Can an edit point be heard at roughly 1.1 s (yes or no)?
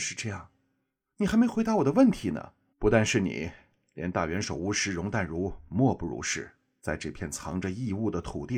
no